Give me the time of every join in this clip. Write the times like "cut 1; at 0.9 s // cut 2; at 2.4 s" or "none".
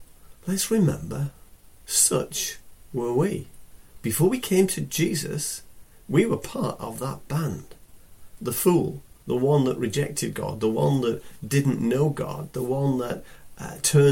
none